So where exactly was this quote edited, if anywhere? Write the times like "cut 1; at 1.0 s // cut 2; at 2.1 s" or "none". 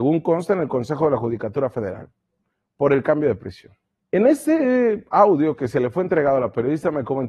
cut 1; at 4.0 s